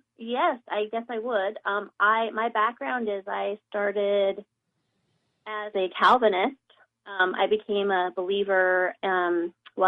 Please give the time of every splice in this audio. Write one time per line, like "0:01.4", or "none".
none